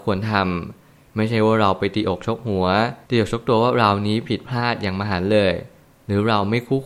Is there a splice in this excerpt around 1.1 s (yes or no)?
no